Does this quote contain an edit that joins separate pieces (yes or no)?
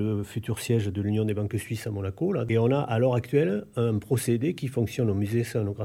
no